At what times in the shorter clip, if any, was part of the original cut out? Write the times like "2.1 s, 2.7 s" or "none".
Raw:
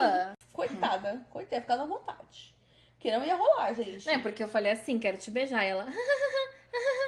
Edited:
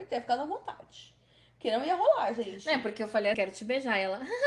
3.3 s